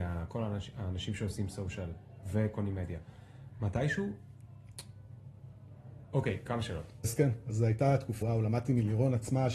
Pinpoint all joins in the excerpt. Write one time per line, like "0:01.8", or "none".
0:07.0
0:08.2